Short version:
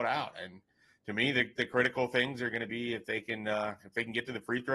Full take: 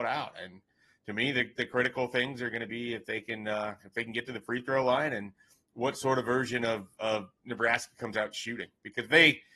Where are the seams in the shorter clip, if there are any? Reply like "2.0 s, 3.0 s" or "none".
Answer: none